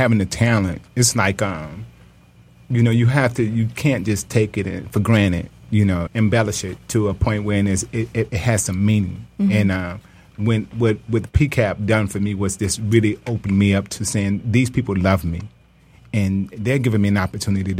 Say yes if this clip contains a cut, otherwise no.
yes